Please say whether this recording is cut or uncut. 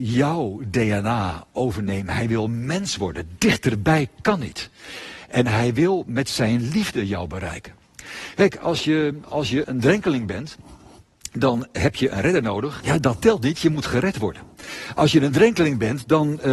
cut